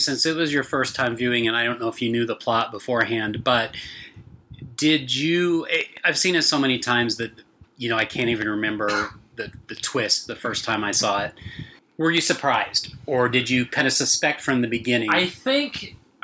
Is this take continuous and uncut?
yes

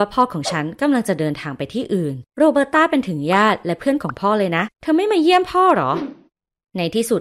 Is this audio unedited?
yes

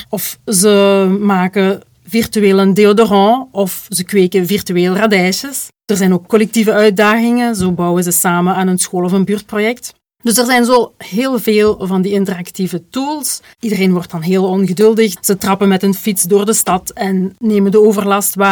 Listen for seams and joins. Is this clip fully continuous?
no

